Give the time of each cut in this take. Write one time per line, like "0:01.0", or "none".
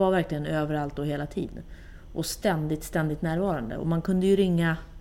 none